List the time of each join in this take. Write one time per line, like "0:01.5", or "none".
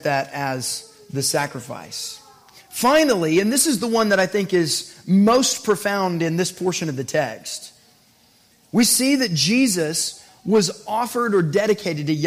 none